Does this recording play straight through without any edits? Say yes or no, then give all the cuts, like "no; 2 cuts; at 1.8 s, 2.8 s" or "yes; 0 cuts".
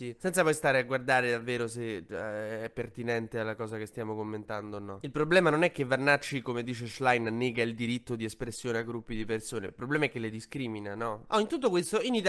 yes; 0 cuts